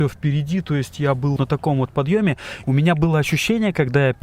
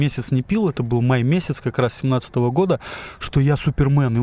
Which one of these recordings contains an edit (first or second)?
first